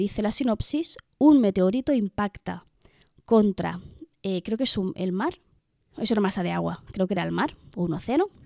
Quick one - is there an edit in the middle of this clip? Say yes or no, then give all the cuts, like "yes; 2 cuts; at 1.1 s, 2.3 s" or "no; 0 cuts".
no; 0 cuts